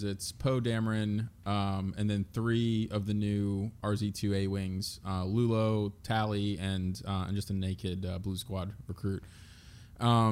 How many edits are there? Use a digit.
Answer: 0